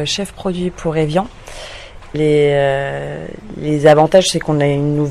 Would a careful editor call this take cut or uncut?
cut